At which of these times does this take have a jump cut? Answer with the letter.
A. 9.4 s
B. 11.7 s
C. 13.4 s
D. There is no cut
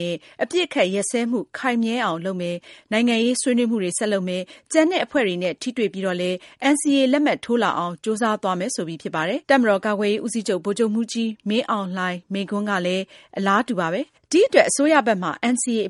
A